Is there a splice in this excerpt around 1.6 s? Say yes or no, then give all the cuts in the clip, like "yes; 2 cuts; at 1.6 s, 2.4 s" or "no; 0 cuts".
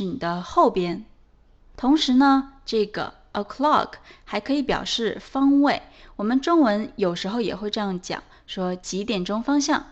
yes; 1 cut; at 1.6 s